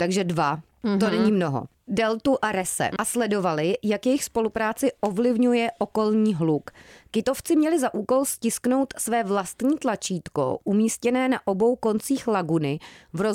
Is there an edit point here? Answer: yes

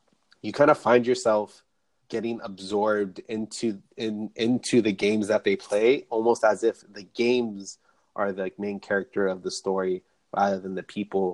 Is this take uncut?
no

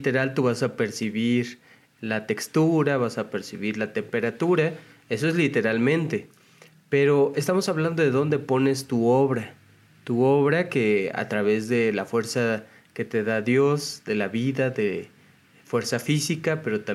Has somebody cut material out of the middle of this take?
no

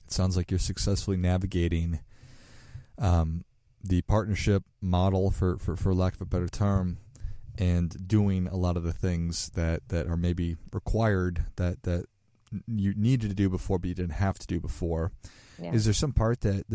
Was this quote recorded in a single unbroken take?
yes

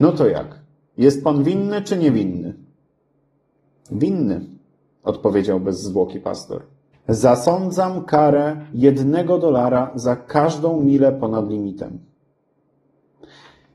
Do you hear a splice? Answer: yes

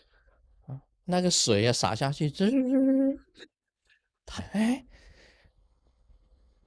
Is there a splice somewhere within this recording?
yes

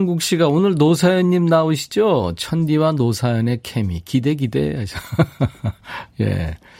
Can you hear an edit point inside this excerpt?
no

